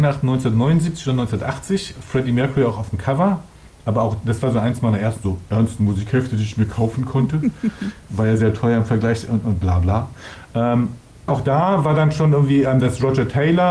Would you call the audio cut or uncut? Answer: cut